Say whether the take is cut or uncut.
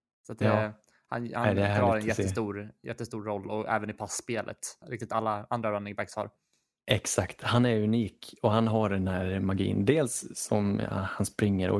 cut